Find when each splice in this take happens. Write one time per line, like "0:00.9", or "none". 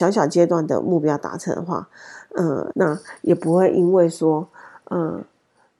0:02.7